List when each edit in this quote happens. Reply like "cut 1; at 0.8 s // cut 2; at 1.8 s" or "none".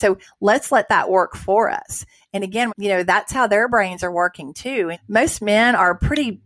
cut 1; at 2.7 s // cut 2; at 4.9 s